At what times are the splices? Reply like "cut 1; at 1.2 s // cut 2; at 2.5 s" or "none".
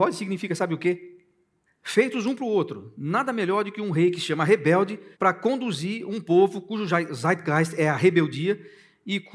cut 1; at 1.7 s // cut 2; at 5.1 s